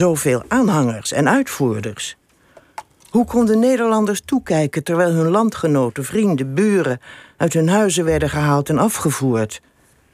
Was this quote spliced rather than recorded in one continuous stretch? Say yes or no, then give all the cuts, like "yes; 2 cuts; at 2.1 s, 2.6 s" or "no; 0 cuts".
no; 0 cuts